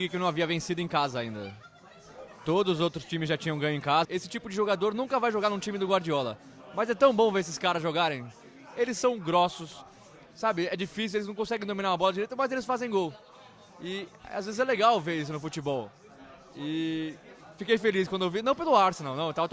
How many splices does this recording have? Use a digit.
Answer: 1